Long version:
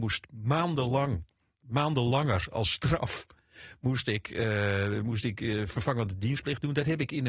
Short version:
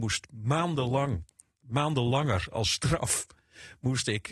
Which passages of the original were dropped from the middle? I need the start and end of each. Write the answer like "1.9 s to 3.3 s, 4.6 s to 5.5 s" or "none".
none